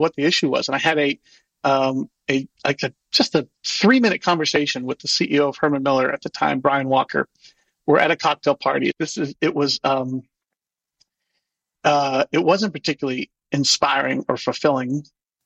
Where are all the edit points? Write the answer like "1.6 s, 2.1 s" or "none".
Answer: 2.6 s, 8.9 s